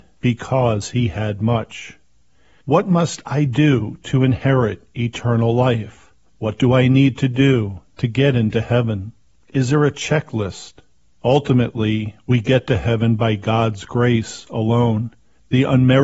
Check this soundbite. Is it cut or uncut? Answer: cut